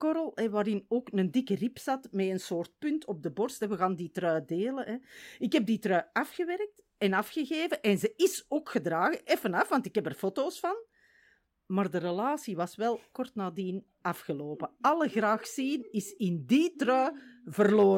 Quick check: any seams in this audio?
no; 0 cuts

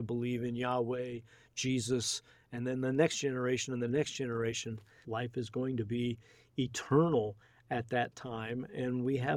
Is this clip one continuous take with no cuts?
no; 1 cut; at 5.0 s

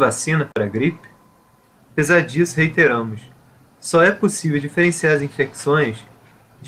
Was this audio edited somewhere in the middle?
yes; 1 cut; at 1.7 s

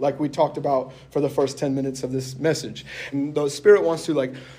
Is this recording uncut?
no; 1 cut; at 3.1 s

